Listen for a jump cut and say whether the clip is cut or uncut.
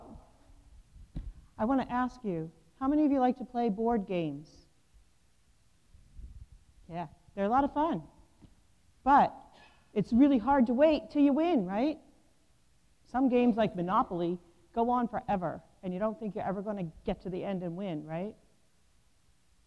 uncut